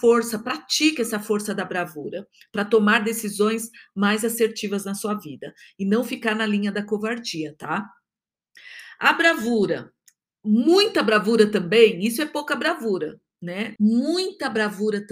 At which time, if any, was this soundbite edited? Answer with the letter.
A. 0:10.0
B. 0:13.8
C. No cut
B